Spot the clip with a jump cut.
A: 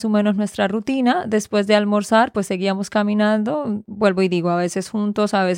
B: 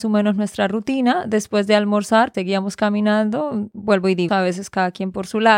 B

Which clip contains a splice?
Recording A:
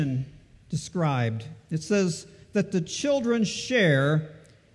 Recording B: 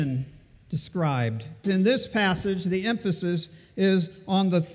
B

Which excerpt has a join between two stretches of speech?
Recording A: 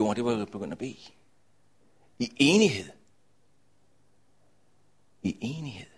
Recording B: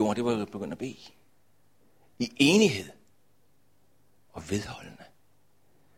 B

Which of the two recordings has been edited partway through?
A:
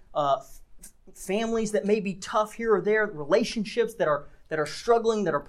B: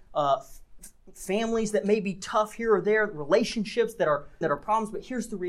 B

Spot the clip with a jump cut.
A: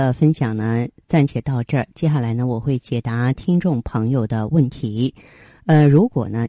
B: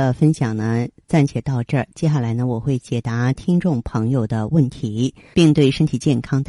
B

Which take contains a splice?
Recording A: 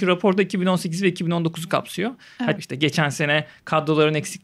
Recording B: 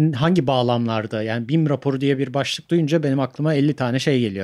A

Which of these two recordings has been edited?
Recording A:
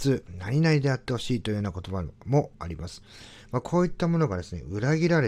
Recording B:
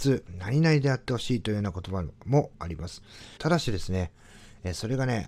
B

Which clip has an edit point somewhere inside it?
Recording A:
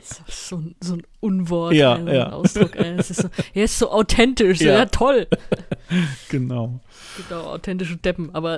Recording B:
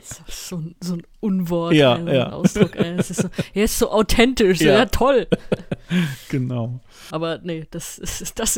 B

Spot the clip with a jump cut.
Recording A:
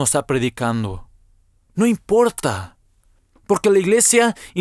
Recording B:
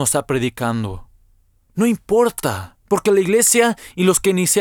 B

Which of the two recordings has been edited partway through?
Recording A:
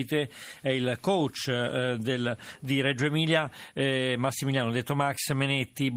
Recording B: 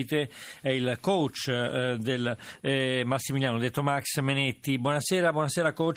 B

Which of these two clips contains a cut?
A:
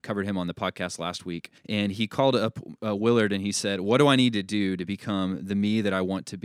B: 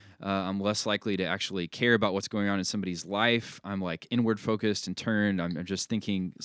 A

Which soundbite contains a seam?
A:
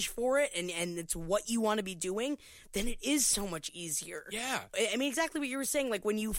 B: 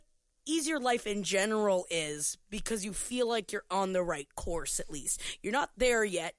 A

